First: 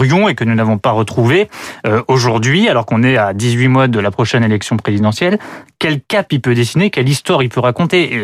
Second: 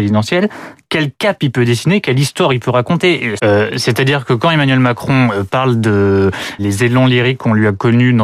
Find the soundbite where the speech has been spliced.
second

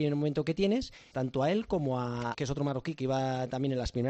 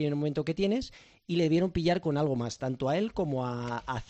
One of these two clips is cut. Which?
first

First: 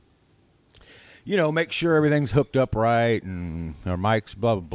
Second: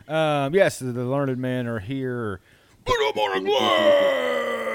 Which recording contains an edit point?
second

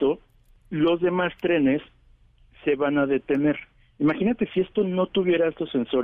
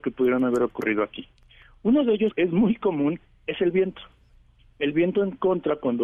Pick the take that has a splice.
second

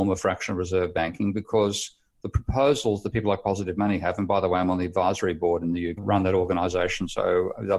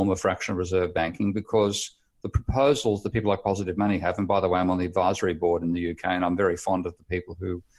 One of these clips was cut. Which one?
first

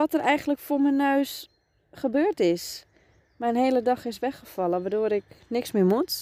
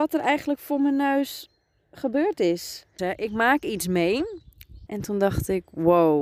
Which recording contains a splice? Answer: second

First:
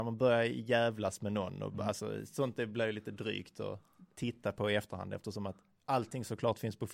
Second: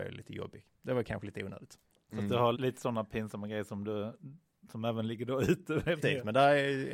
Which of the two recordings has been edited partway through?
second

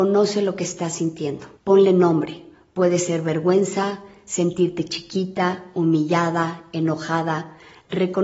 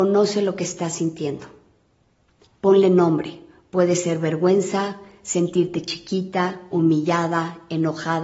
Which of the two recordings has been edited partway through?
first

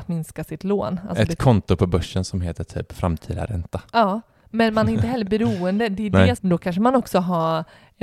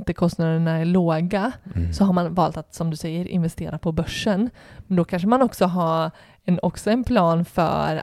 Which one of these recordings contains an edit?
first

